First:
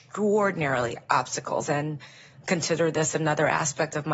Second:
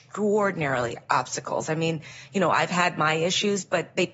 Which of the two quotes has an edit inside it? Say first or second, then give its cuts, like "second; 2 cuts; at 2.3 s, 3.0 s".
first; 1 cut; at 1.7 s